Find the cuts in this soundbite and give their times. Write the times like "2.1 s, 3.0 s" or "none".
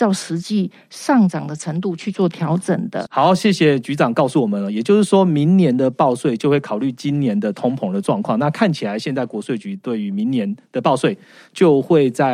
3.1 s